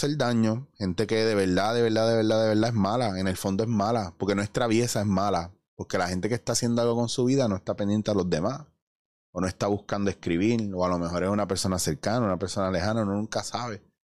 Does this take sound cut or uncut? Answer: uncut